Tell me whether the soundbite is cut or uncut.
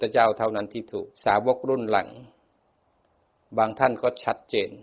cut